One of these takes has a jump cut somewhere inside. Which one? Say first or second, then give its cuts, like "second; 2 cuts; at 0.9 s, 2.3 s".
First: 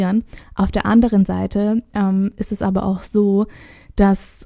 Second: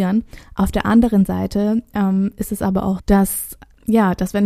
second; 1 cut; at 3.0 s